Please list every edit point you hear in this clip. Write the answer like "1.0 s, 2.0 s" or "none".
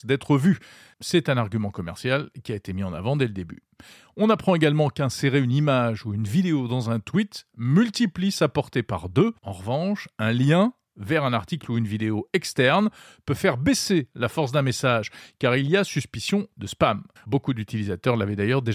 9.4 s, 17.2 s